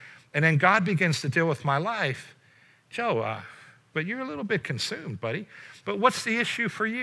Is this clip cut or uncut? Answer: cut